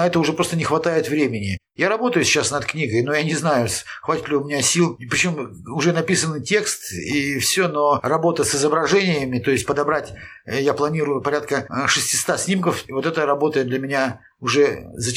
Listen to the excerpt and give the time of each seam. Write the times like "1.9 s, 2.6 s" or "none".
none

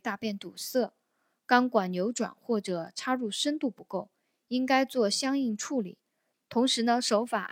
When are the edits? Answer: 6.3 s

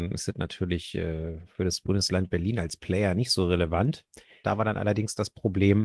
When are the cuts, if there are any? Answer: 4.4 s

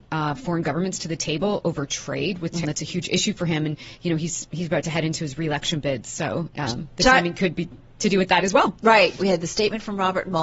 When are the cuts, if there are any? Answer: 2.6 s, 9.2 s

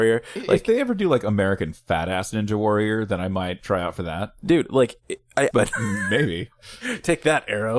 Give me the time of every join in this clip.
5.5 s

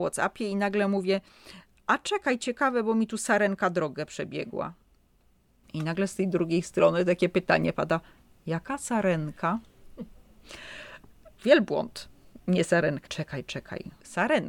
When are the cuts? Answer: 13.1 s

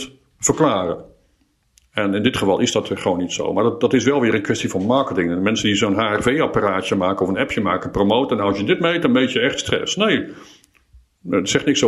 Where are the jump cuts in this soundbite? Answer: none

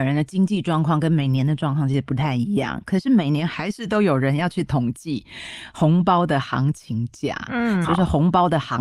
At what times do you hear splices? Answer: 7.8 s

